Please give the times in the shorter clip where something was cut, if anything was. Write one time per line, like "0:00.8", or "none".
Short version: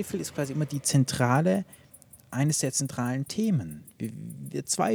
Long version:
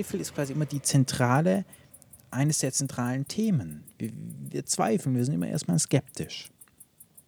none